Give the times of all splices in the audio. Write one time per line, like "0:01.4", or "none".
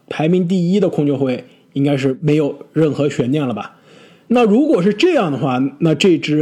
0:04.3